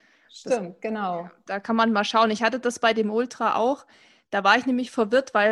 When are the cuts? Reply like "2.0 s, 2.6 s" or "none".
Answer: none